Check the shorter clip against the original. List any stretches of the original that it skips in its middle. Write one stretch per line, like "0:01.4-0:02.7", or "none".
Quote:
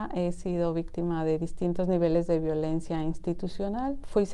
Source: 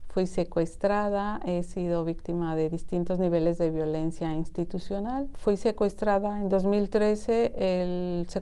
none